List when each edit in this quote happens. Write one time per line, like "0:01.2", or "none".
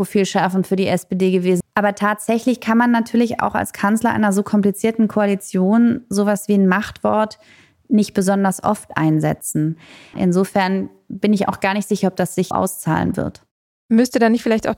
0:01.6
0:10.1
0:12.5